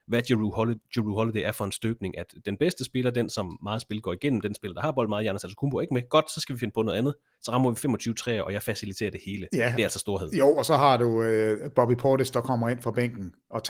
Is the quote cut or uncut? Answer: uncut